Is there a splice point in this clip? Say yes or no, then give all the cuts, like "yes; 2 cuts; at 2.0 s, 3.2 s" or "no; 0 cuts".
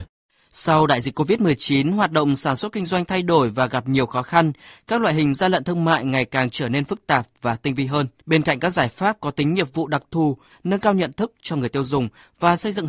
yes; 2 cuts; at 8.2 s, 10.5 s